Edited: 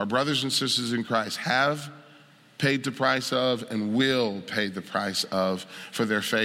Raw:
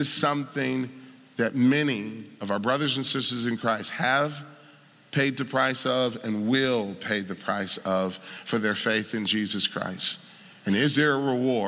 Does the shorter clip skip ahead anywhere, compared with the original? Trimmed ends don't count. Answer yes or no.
no